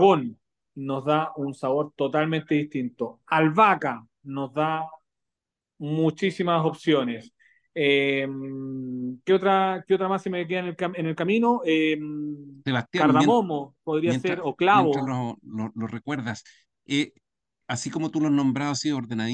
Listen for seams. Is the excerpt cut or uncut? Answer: uncut